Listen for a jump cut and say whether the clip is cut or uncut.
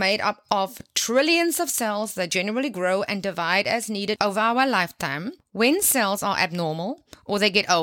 uncut